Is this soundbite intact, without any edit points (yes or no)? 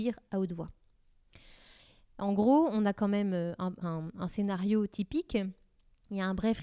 no